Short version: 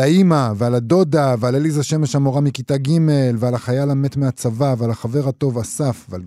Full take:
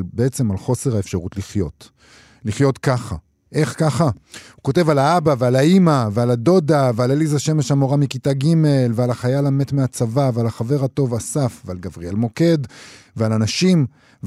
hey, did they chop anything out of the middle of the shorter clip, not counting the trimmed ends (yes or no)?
no